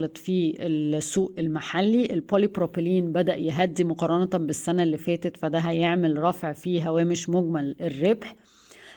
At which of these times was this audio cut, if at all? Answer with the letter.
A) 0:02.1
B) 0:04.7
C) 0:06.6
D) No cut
D